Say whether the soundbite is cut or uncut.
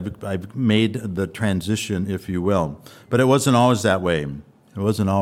uncut